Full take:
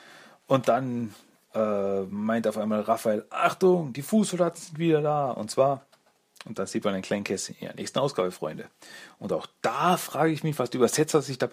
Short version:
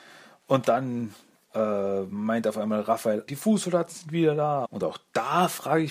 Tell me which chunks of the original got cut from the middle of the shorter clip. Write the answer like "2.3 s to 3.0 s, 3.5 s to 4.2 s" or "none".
3.3 s to 3.9 s, 5.3 s to 9.1 s